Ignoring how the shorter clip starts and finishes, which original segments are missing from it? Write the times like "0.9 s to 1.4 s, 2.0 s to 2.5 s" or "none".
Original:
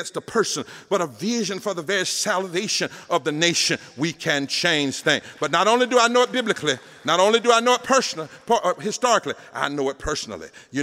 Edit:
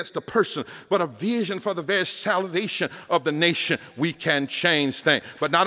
none